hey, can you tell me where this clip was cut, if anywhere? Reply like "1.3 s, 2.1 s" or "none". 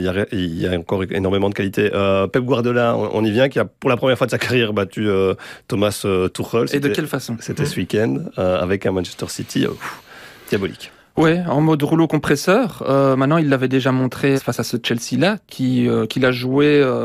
14.4 s